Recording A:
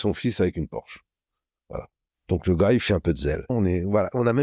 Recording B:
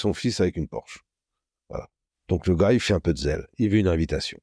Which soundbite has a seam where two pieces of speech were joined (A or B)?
A